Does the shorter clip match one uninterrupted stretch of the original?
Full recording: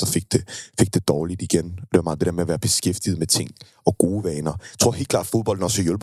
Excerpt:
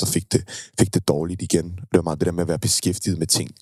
yes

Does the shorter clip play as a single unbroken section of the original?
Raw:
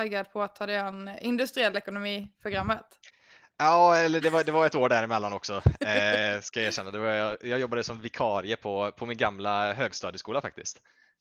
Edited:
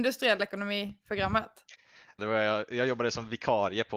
no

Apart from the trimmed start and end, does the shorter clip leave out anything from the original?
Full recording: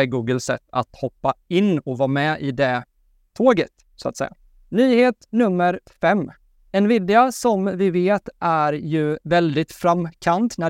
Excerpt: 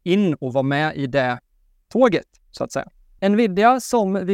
yes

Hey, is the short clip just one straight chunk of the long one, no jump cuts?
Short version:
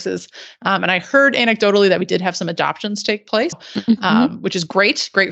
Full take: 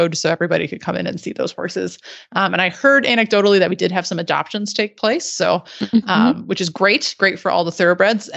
no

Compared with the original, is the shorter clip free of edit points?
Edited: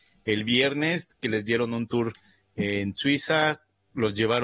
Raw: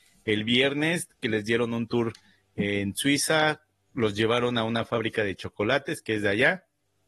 yes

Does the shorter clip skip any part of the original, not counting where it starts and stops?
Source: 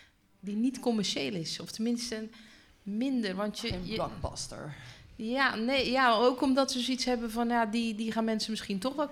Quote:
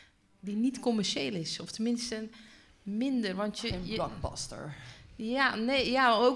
no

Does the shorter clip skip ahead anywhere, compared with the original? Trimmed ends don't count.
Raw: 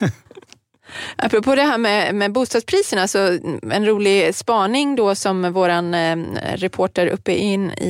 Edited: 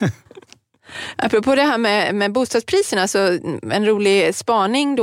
no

